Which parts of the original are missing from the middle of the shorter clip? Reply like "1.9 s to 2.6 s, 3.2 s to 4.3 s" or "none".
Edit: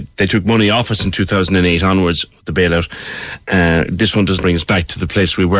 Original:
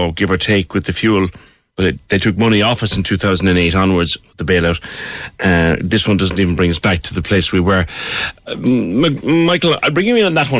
6.3 s to 6.6 s